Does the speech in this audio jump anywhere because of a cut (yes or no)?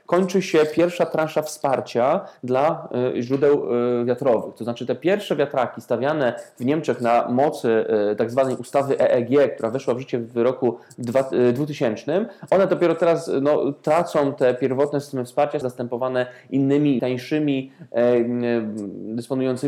yes